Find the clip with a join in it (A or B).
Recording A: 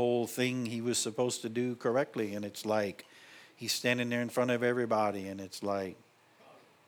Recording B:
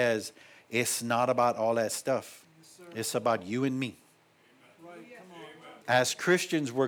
B